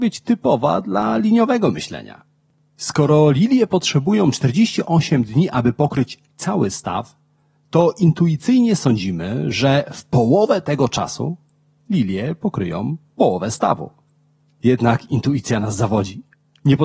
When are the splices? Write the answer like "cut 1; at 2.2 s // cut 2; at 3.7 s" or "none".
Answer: none

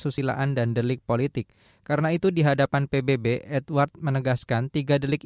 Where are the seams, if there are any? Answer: none

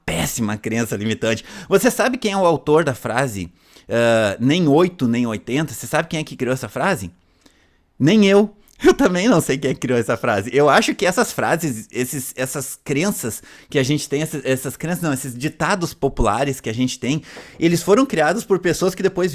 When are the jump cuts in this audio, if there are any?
none

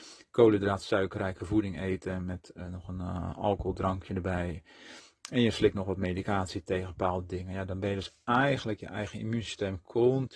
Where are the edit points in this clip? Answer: none

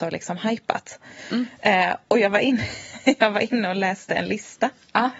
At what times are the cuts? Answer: none

